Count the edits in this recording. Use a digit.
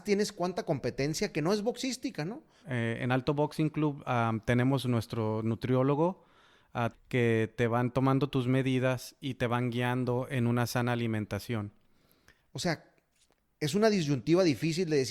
3